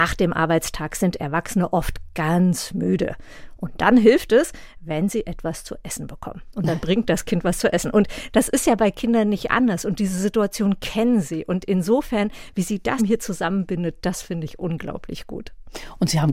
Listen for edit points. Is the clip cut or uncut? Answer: cut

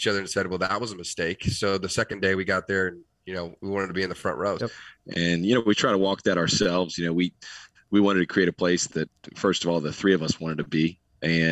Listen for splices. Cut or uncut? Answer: cut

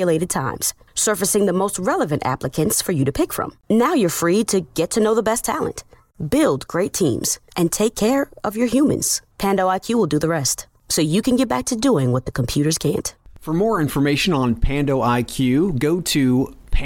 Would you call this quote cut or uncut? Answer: uncut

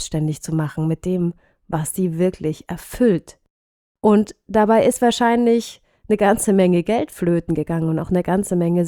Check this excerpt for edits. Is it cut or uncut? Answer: uncut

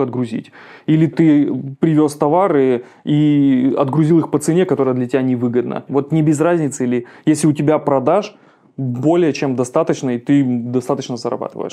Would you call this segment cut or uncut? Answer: cut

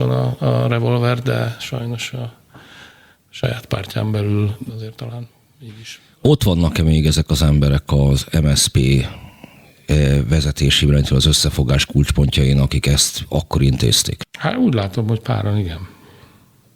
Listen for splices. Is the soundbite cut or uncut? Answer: cut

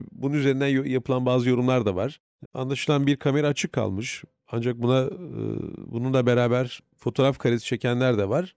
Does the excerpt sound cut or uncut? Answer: cut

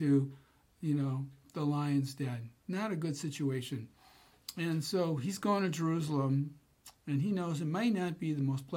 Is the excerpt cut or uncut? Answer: uncut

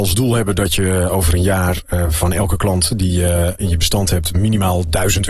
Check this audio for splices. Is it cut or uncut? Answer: uncut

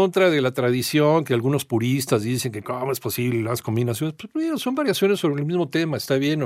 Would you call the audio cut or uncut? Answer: uncut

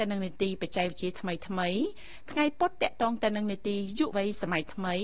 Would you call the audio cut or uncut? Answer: cut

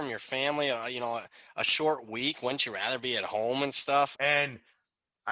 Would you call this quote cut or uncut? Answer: cut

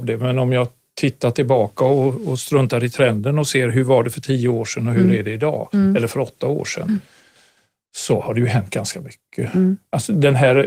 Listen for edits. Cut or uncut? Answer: uncut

